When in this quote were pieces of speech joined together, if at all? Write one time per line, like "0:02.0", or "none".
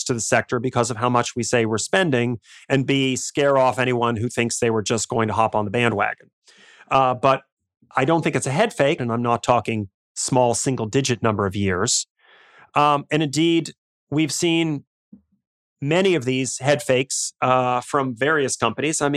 0:09.0